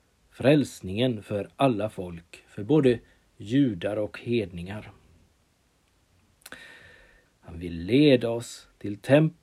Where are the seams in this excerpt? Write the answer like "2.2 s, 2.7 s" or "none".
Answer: 7.3 s